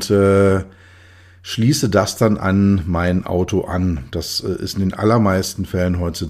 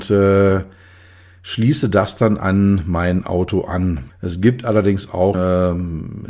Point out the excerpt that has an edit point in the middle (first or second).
second